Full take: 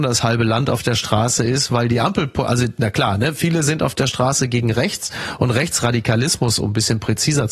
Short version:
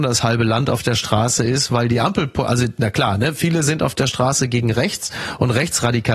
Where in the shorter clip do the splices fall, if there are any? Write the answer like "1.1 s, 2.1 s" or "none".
none